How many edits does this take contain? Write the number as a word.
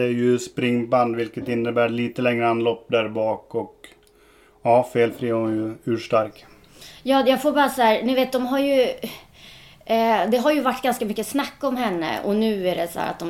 zero